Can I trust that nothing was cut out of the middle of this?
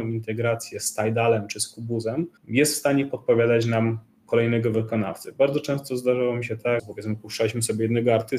no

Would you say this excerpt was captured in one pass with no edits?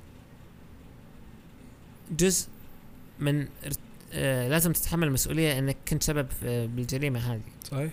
yes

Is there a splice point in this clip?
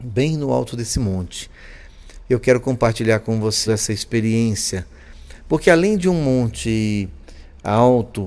yes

